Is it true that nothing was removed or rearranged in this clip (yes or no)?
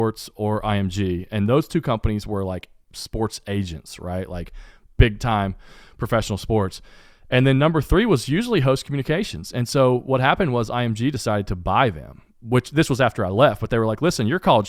yes